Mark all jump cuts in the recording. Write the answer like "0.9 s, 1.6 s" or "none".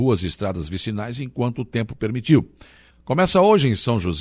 2.9 s